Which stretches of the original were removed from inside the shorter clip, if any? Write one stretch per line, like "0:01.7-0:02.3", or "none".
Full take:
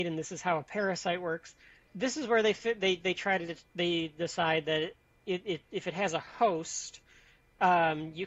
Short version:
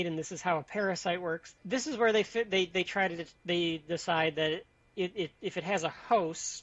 0:01.6-0:01.9